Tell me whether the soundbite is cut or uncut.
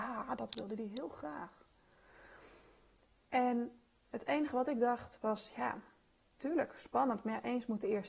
uncut